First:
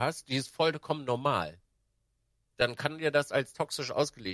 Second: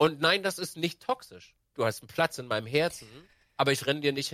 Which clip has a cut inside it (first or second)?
second